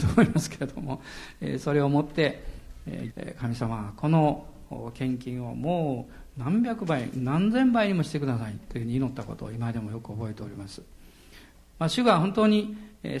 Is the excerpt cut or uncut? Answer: cut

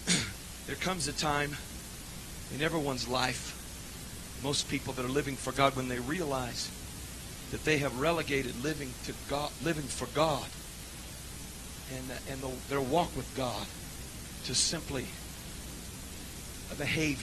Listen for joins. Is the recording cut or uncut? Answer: uncut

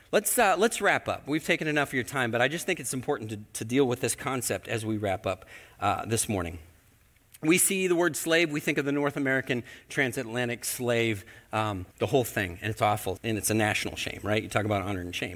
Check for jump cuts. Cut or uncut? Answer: cut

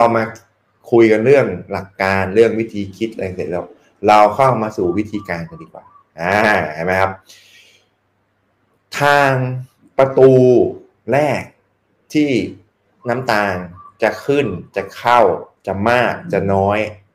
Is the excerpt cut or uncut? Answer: uncut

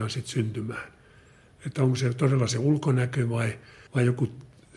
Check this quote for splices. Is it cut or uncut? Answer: uncut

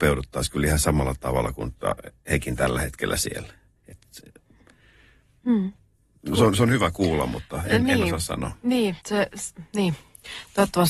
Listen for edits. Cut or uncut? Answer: uncut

